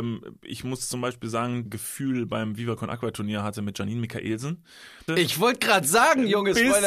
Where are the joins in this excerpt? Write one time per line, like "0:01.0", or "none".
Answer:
0:01.7
0:05.1